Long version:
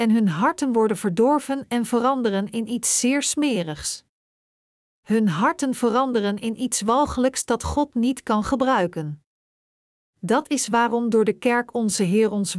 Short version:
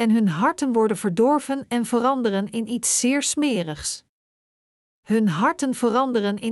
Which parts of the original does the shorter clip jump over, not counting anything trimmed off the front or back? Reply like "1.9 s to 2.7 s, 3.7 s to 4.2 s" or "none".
none

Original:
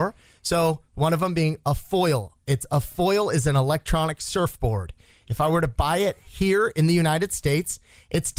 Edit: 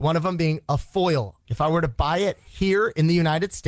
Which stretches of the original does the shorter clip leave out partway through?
2.4 s to 5.2 s

